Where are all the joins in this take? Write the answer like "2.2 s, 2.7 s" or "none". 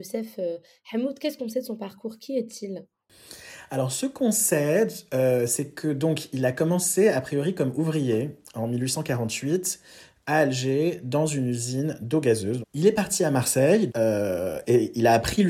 12.6 s, 13.9 s